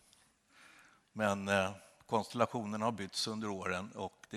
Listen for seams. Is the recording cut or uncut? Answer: cut